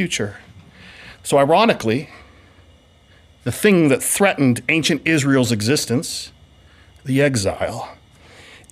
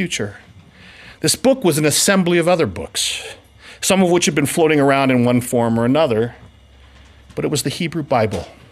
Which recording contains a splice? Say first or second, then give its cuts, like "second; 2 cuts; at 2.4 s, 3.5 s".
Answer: first; 1 cut; at 1.2 s